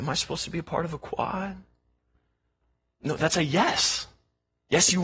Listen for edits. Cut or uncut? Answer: uncut